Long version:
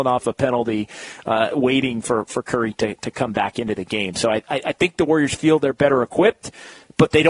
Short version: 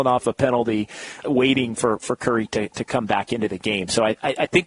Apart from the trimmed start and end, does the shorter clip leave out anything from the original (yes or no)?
yes